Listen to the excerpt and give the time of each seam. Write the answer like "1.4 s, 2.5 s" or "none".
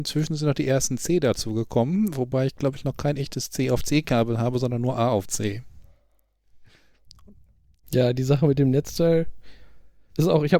7.8 s